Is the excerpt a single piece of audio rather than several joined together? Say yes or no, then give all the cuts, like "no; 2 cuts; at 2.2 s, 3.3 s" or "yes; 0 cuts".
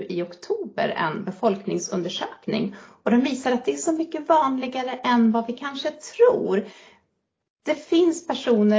yes; 0 cuts